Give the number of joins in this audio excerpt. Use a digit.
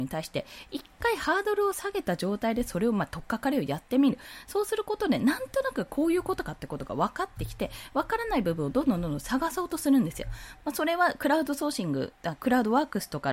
1